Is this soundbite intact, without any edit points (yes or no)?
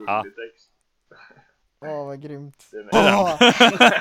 no